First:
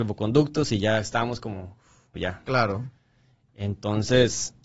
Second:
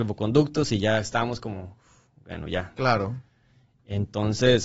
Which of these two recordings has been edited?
first; 1 cut; at 2.1 s

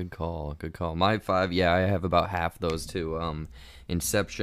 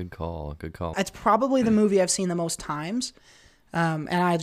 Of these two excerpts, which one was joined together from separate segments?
second; 1 cut; at 0.9 s

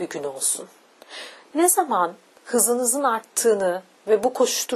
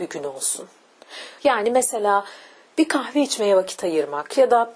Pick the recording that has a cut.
second; 1 cut; at 1.4 s

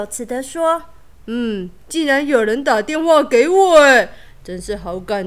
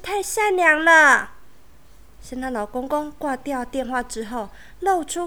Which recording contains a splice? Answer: second; 1 cut; at 2.2 s

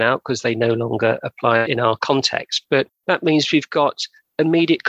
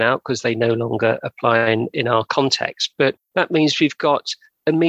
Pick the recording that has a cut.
first; 1 cut; at 1.6 s

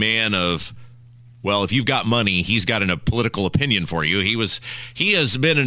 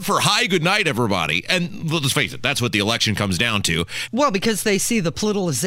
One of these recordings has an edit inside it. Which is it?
second; 1 cut; at 4.1 s

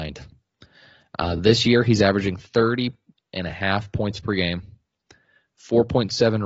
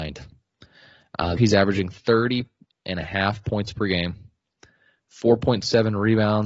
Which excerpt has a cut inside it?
second; 1 cut; at 1.4 s

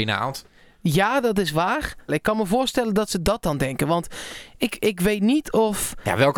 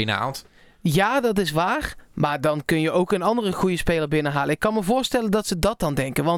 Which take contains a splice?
first; 1 cut; at 2.1 s

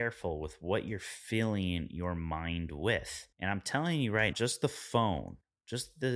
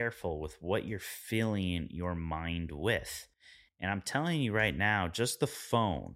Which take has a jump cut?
first; 2 cuts; at 3.3 s, 4.3 s

